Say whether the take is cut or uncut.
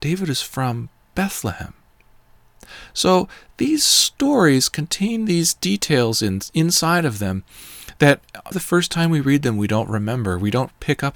cut